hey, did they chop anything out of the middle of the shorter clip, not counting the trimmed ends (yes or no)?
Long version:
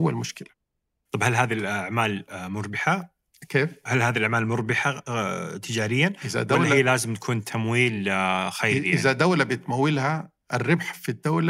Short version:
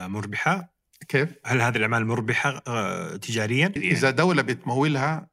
yes